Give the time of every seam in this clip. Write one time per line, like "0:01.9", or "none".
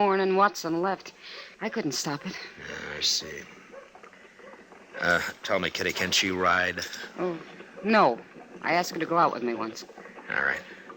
0:01.5